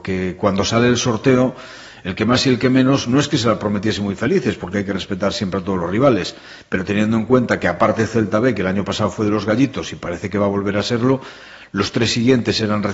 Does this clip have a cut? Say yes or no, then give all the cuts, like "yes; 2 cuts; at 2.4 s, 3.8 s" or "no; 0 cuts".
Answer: no; 0 cuts